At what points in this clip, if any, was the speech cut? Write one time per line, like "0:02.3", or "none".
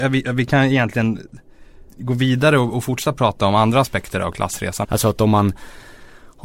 0:01.9
0:04.8